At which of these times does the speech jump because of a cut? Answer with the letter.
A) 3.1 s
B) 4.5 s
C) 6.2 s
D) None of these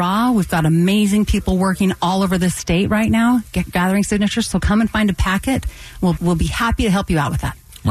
C